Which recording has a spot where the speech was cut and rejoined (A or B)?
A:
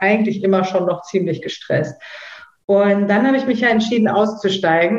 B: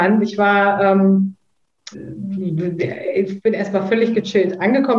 B